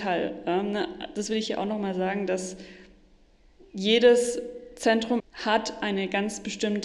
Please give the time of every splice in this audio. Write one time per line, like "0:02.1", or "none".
0:05.2

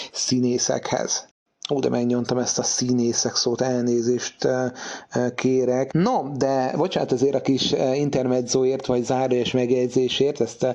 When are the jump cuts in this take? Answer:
0:05.9

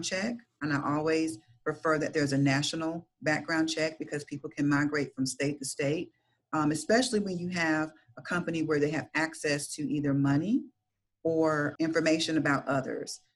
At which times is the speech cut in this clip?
0:11.8

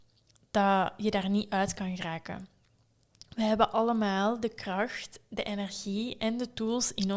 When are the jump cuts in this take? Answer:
none

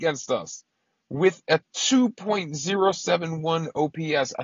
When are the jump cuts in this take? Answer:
none

